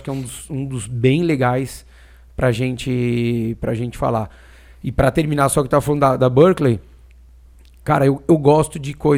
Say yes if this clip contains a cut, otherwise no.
no